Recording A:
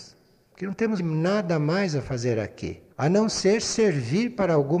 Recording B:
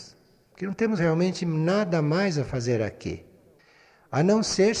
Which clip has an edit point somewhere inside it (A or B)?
A